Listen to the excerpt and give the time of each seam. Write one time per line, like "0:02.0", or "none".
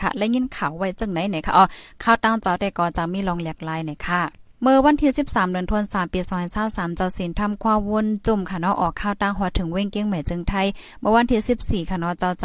0:04.5